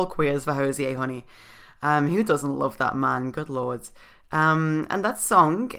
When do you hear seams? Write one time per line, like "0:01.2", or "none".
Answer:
none